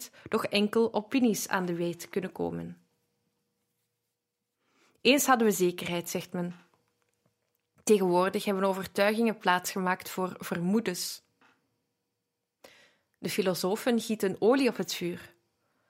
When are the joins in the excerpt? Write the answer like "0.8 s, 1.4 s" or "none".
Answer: none